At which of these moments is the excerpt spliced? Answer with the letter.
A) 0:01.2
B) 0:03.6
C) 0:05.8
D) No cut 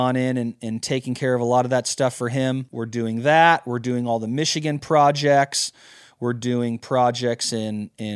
D